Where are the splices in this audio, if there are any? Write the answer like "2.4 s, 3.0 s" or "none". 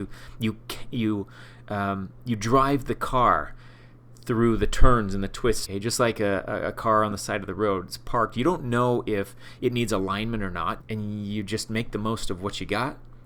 5.7 s, 10.8 s